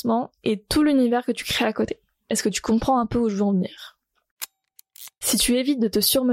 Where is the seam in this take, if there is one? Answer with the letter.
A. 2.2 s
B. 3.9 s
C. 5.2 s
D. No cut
D